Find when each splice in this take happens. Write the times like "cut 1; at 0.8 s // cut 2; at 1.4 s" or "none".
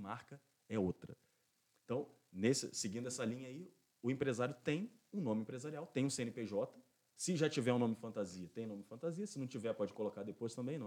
none